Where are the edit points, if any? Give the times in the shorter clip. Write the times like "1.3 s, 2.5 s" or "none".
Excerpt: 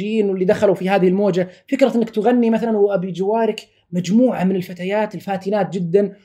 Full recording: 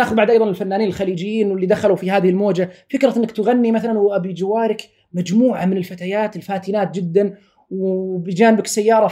none